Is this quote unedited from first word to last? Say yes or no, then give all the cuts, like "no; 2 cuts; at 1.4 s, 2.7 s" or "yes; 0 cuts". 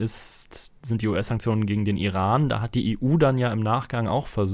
yes; 0 cuts